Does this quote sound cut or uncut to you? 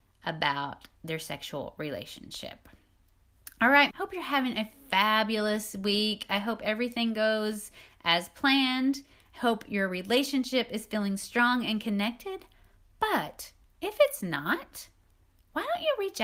cut